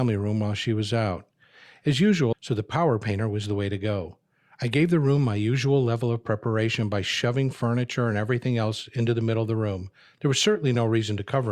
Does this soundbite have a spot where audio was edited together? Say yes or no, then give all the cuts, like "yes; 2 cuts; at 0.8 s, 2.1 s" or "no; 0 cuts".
yes; 1 cut; at 2.3 s